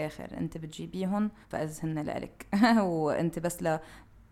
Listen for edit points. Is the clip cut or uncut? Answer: cut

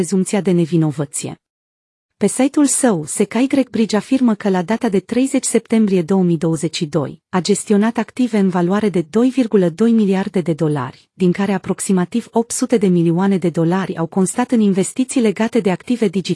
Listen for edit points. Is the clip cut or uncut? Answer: cut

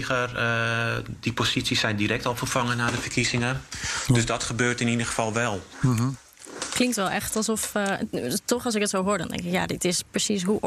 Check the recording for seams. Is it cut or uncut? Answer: uncut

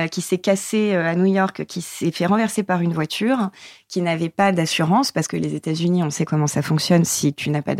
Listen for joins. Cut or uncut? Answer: uncut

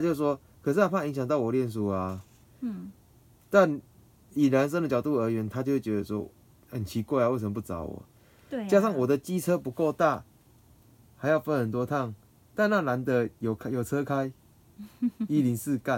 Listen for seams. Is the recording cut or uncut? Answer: uncut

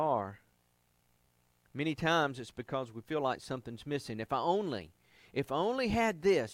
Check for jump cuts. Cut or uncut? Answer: uncut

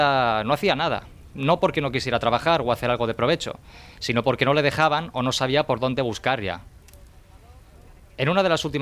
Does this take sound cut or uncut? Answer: uncut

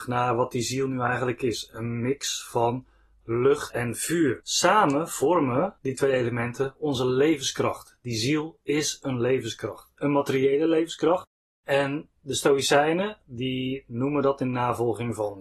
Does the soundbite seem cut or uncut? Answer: uncut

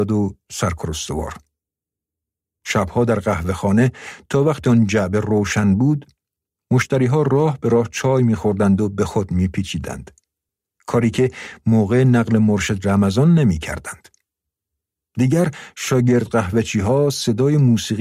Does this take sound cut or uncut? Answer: uncut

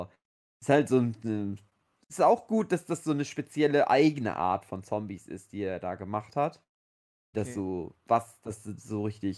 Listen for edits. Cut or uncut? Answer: cut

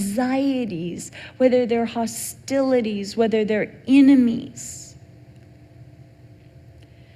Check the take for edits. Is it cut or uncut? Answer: uncut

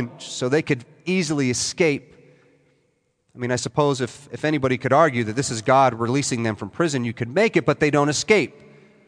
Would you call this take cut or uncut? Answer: uncut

